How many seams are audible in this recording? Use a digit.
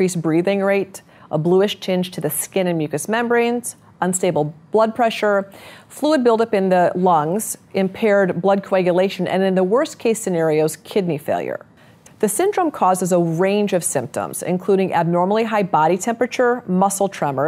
1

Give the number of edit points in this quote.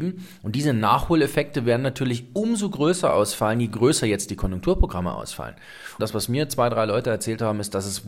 1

